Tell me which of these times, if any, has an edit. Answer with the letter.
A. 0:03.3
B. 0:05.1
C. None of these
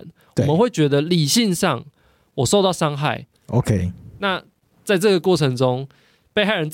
A